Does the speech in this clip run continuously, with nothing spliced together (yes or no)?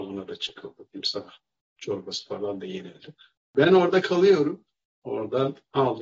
no